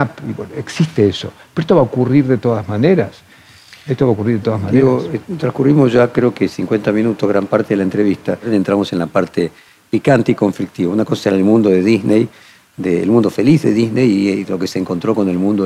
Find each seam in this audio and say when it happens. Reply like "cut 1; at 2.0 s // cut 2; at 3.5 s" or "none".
none